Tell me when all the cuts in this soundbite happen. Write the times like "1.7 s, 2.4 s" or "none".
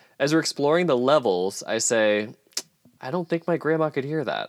3.0 s